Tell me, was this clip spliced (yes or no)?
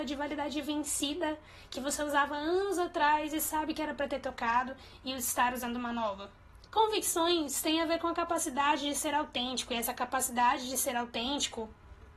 yes